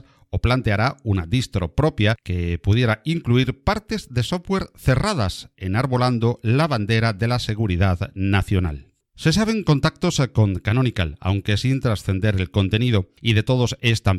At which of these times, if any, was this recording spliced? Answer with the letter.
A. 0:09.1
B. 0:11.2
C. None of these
C